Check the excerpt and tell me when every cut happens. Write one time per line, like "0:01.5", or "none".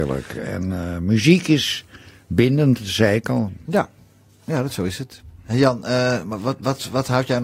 none